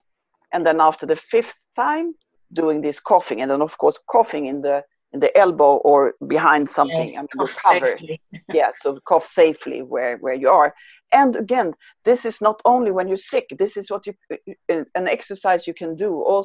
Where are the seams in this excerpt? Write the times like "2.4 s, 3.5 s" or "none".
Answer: none